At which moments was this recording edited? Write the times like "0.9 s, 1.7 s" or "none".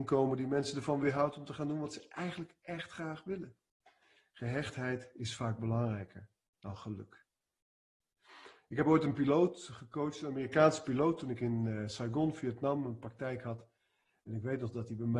none